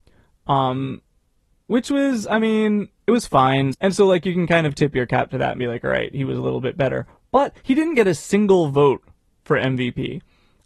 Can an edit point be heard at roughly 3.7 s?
yes; 1 cut; at 3.7 s

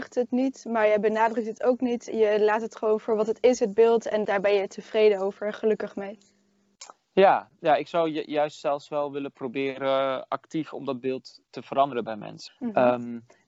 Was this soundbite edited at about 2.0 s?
no; 2 cuts; at 11.5 s, 12.5 s

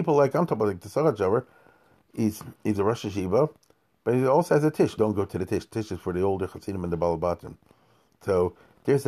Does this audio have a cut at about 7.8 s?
no; 1 cut; at 5.0 s

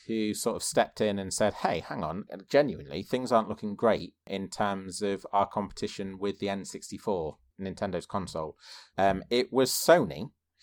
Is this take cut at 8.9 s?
yes; 3 cuts; at 2.3 s, 7.5 s, 8.9 s

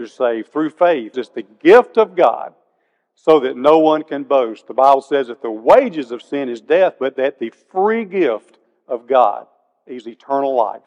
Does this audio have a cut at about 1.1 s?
yes; 1 cut; at 1.1 s

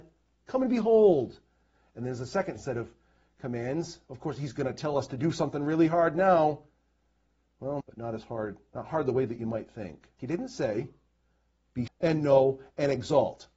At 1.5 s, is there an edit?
no; 3 cuts; at 7.8 s, 10.2 s, 11.9 s

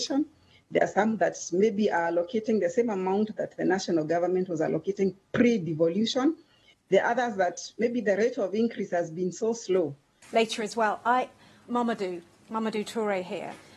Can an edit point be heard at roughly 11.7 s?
yes; 2 cuts; at 10.2 s, 11.7 s

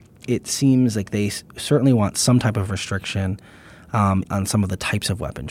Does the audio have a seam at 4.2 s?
yes; 1 cut; at 4.2 s

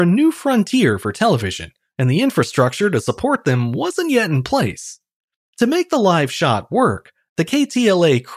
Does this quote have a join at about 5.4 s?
yes; 1 cut; at 5.4 s

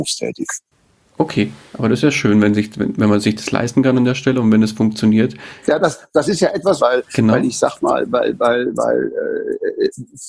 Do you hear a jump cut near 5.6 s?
yes; 2 cuts; at 5.6 s, 6.8 s

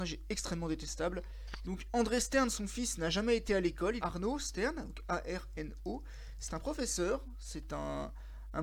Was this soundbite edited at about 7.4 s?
no; 2 cuts; at 1.6 s, 4.0 s

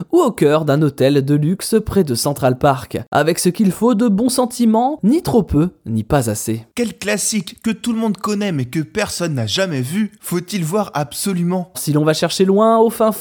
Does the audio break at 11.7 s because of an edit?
yes; 1 cut; at 11.7 s

